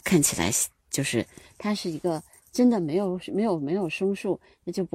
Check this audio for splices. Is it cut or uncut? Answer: uncut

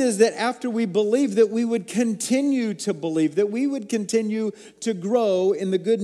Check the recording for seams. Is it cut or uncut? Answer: uncut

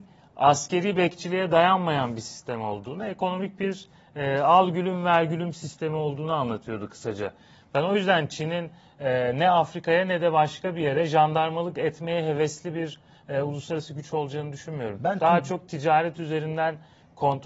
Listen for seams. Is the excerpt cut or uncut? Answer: uncut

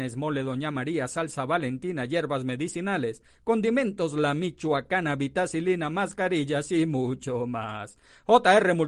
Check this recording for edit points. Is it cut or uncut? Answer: uncut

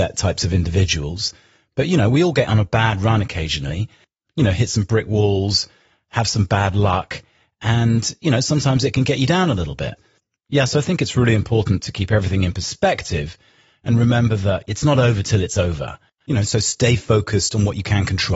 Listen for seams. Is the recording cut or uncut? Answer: cut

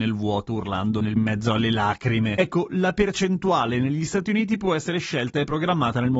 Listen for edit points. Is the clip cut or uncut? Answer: uncut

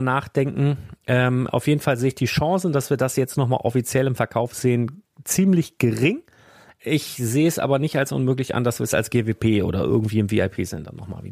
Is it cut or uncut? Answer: uncut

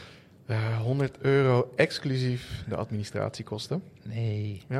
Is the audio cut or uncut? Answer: uncut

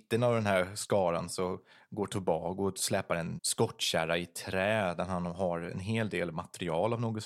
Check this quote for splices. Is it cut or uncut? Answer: cut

